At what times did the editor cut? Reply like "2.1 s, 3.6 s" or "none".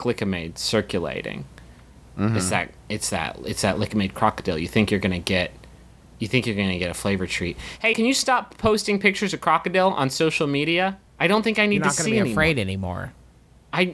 7.9 s, 11.1 s